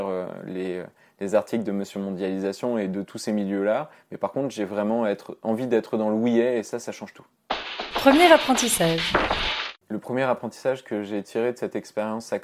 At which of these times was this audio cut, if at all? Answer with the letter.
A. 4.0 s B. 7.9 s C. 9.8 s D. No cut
C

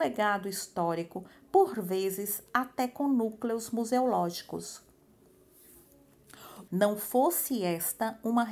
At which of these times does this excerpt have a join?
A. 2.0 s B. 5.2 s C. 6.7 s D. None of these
C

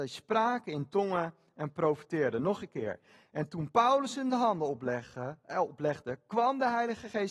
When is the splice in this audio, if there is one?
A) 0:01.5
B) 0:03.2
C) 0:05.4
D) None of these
D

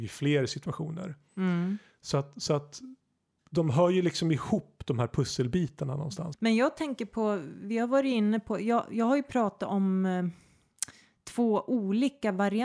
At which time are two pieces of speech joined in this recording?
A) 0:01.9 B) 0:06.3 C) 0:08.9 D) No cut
B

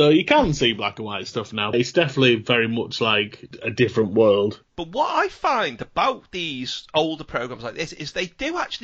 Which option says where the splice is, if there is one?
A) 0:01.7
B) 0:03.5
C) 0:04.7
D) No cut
A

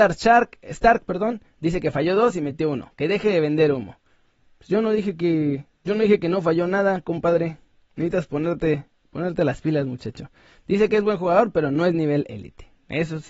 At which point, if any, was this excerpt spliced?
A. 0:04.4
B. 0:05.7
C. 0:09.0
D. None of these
B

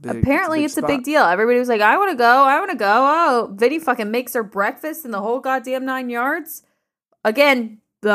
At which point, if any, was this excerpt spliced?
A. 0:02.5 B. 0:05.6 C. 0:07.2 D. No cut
D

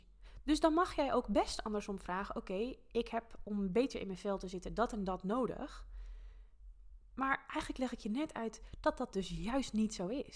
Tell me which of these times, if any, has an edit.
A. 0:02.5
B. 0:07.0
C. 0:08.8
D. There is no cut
B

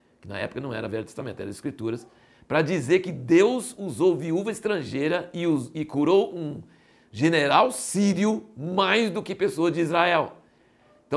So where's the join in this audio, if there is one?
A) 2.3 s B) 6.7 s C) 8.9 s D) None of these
D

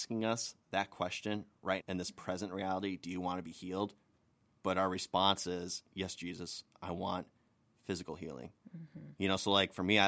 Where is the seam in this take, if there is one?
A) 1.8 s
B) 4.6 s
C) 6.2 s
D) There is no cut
A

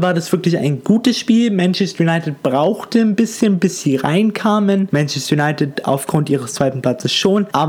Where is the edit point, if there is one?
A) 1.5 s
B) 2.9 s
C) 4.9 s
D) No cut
C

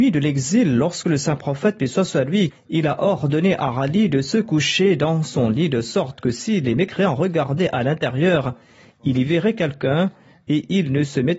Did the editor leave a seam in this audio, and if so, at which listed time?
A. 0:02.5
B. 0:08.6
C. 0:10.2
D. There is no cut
A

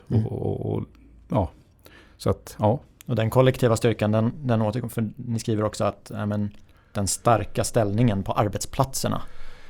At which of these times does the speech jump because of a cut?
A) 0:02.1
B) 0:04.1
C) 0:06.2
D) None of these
D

